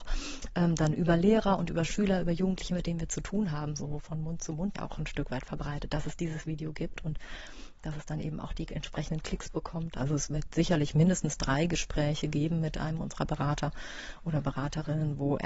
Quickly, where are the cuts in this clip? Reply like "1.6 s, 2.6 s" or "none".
4.7 s, 9.9 s